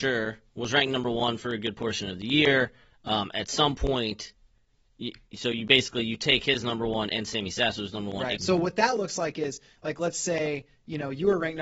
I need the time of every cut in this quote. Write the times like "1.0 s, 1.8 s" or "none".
8.4 s